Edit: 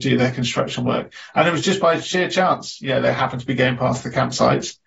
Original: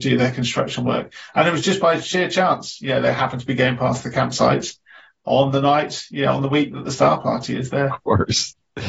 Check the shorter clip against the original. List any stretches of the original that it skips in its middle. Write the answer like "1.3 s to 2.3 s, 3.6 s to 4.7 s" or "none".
none